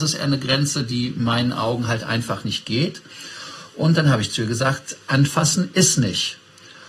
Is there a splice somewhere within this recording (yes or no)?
no